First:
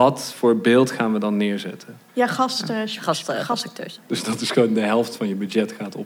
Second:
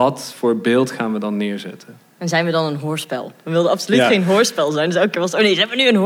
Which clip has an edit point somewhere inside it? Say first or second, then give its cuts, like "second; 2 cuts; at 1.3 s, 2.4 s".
first; 2 cuts; at 2.1 s, 4.0 s